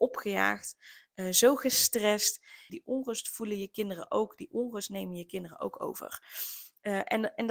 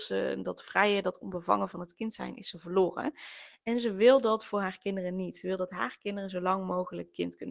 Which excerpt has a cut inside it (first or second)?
first